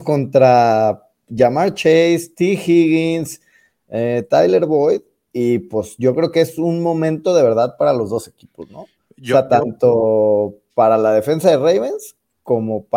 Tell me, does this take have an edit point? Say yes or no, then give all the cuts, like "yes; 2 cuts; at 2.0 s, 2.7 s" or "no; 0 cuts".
no; 0 cuts